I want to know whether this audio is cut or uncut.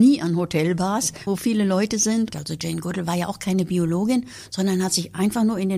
cut